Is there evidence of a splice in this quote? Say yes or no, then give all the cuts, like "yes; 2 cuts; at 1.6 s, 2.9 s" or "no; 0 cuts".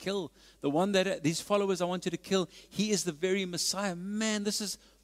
no; 0 cuts